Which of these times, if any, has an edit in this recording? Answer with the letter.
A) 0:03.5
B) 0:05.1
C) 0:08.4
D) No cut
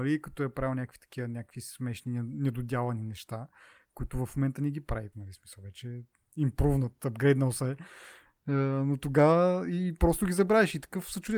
B